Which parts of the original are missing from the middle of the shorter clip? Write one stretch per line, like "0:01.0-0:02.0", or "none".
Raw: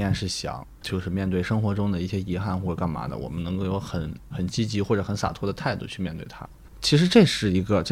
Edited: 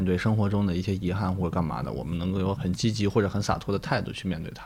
0:03.8-0:04.3